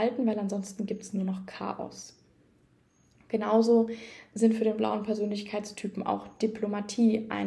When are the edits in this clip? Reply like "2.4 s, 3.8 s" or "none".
none